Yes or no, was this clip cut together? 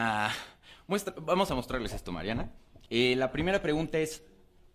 yes